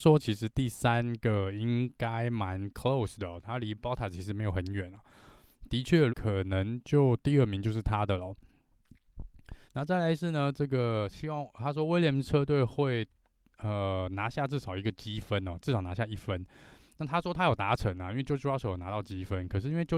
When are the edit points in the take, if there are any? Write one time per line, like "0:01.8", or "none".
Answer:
0:06.1
0:09.7